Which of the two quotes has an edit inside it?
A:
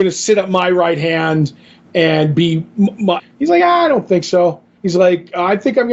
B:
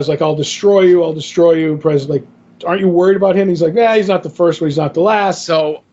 A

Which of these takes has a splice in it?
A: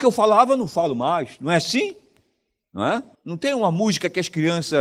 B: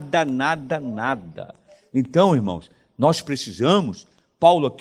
A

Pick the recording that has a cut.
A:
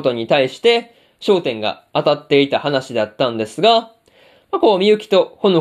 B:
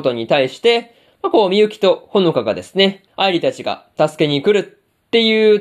B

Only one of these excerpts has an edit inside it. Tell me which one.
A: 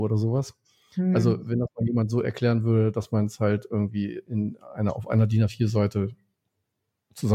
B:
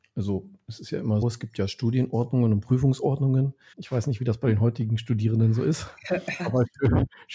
B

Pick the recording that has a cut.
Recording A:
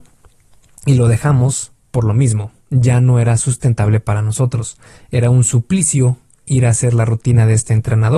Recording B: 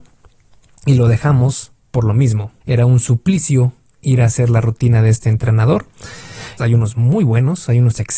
B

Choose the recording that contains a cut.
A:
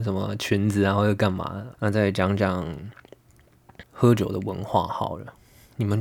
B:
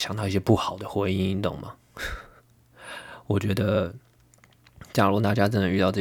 A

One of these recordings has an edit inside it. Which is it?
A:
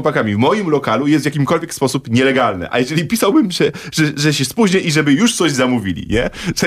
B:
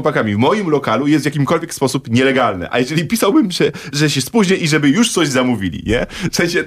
B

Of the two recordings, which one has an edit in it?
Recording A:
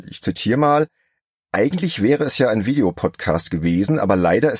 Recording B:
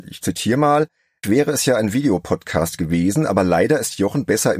B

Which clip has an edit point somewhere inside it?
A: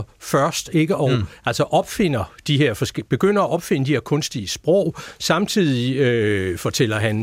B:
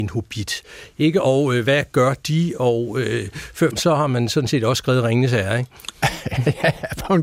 B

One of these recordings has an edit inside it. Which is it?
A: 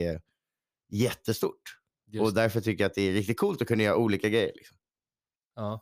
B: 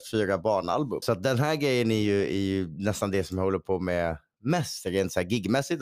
B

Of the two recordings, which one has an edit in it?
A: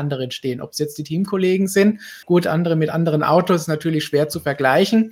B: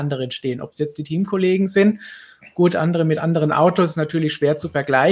A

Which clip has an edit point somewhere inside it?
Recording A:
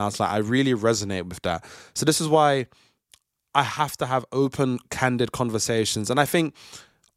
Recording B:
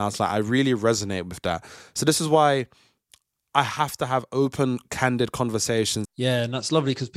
B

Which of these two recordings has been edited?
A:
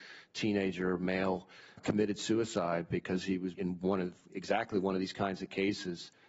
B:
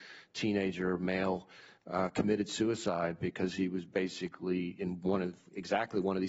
A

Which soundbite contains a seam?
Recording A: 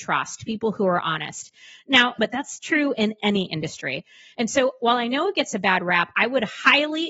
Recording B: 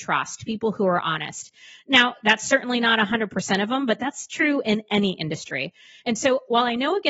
A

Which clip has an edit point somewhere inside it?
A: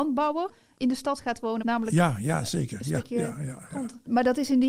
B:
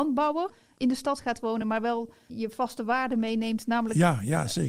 A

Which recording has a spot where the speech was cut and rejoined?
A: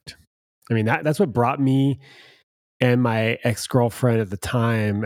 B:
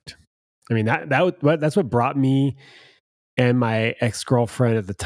A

